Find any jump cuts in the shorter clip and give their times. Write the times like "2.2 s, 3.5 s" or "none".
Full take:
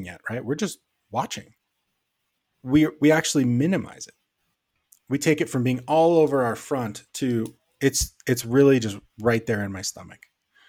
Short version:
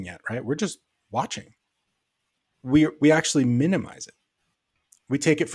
none